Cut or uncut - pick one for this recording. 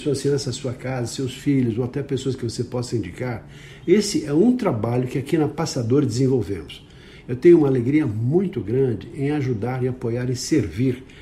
uncut